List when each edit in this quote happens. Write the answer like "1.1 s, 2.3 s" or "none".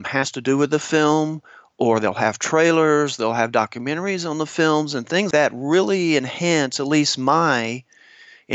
5.3 s